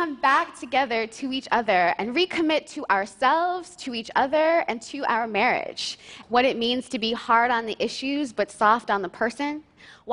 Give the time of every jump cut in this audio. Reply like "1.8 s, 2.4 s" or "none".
6.2 s